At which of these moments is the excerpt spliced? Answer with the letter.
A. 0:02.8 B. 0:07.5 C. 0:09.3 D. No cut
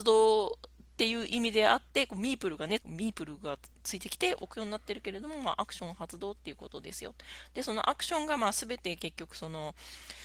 A